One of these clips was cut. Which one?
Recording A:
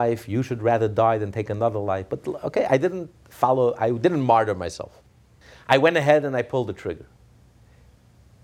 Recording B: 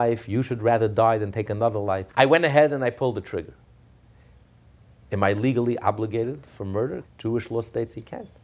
B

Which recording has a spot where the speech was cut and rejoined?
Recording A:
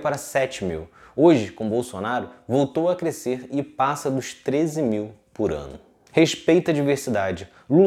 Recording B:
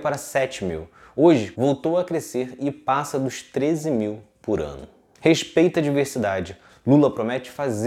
B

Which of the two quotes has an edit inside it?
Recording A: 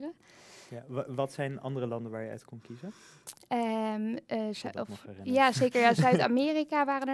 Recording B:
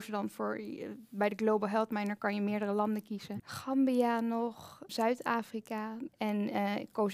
B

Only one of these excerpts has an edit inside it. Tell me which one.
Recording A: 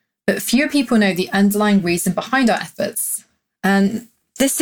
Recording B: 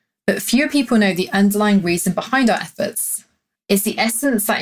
B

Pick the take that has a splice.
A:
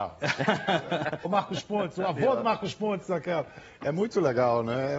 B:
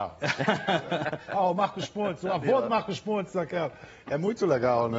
A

